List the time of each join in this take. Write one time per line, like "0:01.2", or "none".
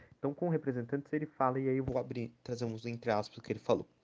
none